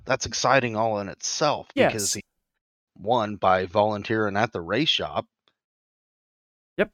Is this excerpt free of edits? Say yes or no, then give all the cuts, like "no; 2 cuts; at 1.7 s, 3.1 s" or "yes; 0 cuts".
no; 1 cut; at 2.9 s